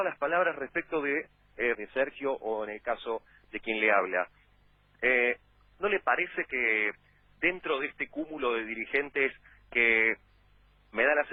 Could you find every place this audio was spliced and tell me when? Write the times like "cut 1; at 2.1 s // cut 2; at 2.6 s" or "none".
cut 1; at 1.7 s

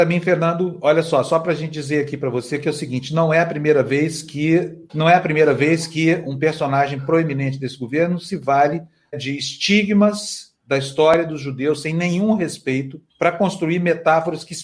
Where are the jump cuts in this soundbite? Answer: cut 1; at 4.9 s // cut 2; at 9.1 s // cut 3; at 13.1 s

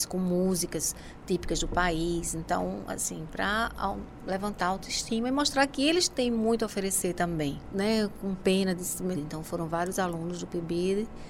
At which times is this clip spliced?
cut 1; at 7.7 s // cut 2; at 9.1 s

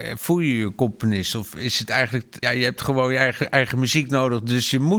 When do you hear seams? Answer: cut 1; at 2.4 s

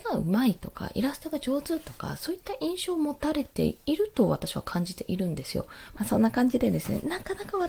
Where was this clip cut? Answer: cut 1; at 5.9 s

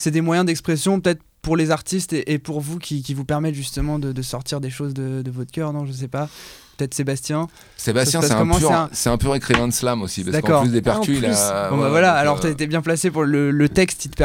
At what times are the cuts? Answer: none

